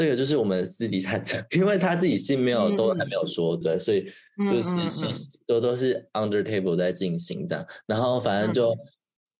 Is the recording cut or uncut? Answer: cut